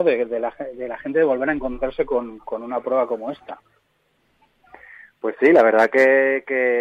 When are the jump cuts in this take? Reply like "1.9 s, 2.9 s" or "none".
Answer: none